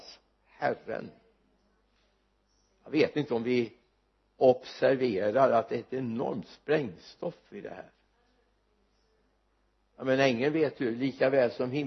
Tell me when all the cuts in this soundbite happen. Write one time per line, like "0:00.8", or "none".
none

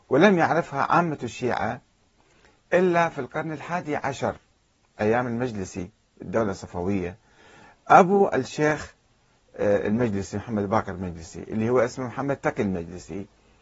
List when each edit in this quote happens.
none

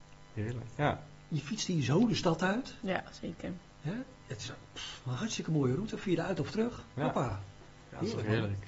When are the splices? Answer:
none

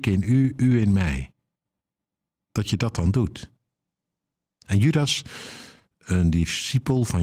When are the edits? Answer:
0:02.4

